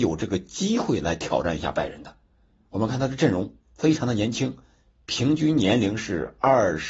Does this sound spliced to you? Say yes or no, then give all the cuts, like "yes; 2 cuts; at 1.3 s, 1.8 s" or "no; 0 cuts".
no; 0 cuts